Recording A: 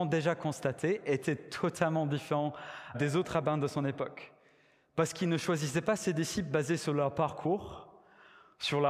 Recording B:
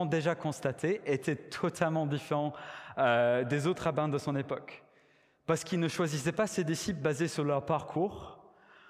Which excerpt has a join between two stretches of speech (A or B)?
A